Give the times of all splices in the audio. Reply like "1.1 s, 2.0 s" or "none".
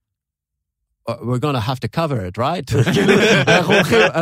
3.2 s